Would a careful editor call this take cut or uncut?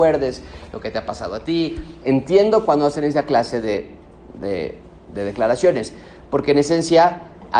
cut